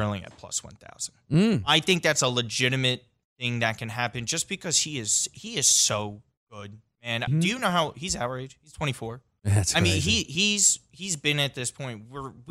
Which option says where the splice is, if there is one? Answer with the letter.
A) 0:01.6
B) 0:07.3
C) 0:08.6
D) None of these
B